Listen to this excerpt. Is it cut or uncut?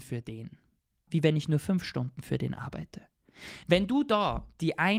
cut